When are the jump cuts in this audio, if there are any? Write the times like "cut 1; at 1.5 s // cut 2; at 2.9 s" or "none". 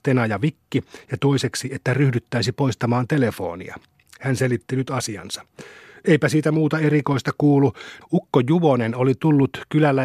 cut 1; at 8.0 s